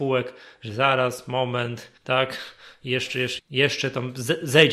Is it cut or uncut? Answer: cut